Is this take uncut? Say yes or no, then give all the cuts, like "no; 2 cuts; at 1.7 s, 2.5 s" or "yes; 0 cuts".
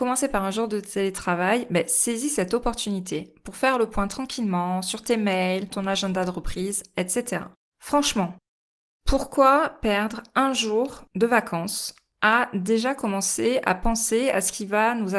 no; 2 cuts; at 5.7 s, 7.7 s